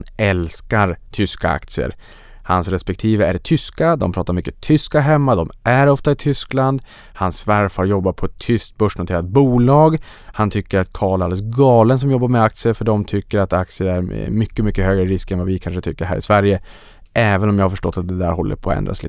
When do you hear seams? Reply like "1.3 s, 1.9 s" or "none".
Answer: none

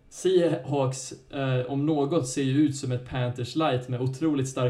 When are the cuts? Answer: none

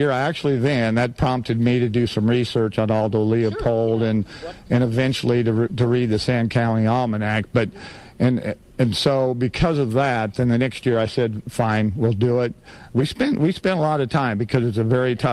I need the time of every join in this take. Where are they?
none

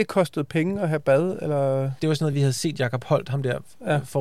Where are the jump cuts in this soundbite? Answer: none

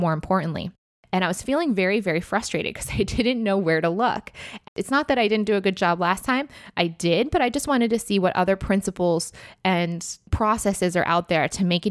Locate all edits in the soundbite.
4.6 s

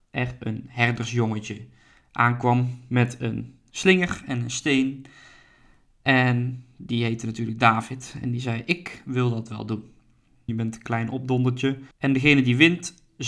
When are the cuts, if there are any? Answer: 10.5 s, 11.9 s

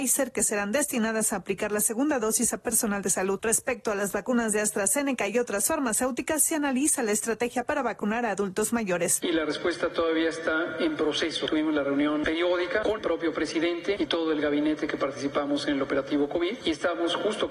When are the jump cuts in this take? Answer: 12.8 s

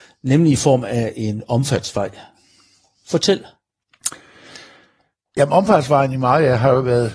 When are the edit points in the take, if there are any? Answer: none

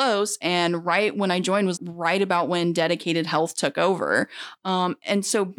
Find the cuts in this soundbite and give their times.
1.8 s

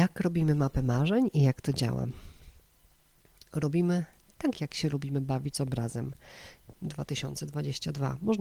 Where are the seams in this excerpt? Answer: 4.5 s, 6.7 s

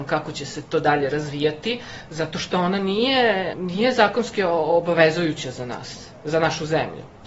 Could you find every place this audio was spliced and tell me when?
3.5 s

